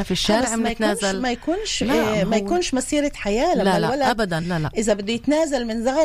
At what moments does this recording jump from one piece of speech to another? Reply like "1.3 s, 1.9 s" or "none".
none